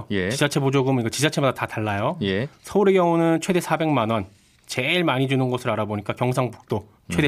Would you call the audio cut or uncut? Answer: uncut